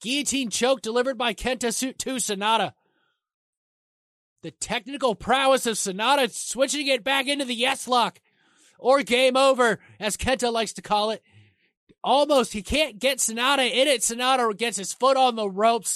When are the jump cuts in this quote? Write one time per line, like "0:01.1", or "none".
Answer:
none